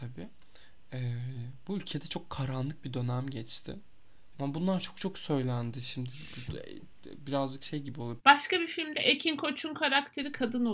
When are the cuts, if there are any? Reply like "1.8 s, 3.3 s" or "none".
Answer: 4.3 s, 8.2 s